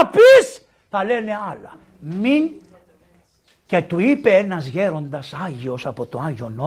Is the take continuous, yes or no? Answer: yes